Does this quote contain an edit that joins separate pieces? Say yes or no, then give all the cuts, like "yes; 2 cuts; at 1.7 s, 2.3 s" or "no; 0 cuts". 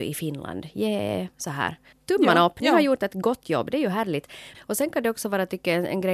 yes; 2 cuts; at 1.9 s, 4.5 s